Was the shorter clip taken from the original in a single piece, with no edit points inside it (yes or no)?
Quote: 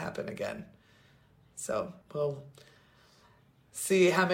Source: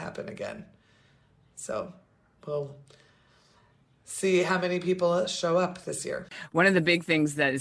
no